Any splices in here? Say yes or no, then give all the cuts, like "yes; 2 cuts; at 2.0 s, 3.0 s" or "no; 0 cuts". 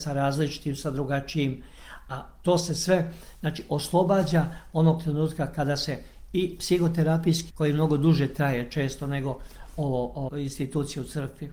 yes; 2 cuts; at 7.5 s, 10.3 s